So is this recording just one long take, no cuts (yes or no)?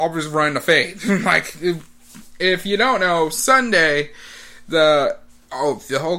yes